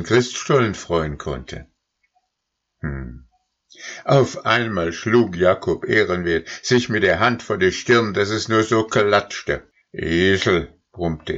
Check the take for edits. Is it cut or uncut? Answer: uncut